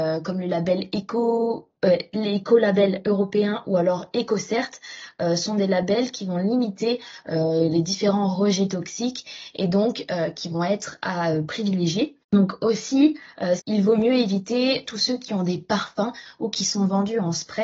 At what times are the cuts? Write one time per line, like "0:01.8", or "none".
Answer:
0:12.2
0:13.6
0:14.8